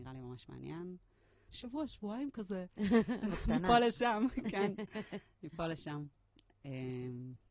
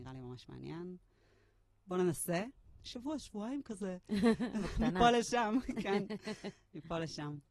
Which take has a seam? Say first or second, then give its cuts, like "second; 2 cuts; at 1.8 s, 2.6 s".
first; 1 cut; at 1.5 s